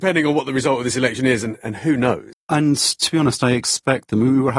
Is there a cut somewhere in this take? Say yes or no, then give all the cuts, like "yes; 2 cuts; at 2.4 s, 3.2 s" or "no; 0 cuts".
yes; 1 cut; at 2.3 s